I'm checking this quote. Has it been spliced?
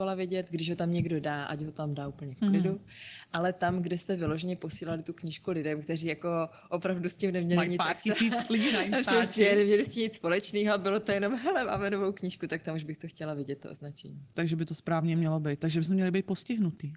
no; 0 cuts

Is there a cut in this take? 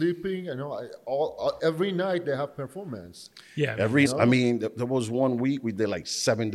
yes; 2 cuts; at 1.6 s, 4.1 s

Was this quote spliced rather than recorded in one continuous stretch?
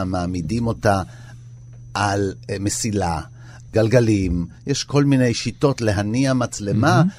yes; 1 cut; at 3.7 s

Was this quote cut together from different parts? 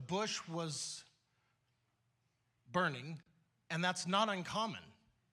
no; 0 cuts

